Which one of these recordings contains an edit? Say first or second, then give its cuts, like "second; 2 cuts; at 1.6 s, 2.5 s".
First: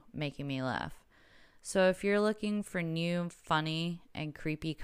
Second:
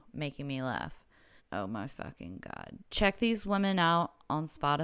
second; 2 cuts; at 1.4 s, 2.8 s